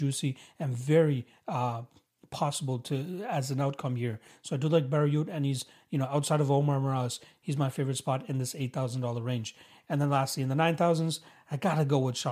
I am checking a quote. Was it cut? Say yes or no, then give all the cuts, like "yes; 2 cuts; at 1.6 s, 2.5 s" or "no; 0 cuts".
no; 0 cuts